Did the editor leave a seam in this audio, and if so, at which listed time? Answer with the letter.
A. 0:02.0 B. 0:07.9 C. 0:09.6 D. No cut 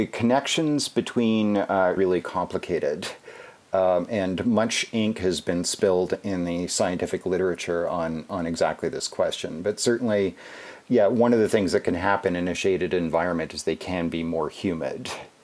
A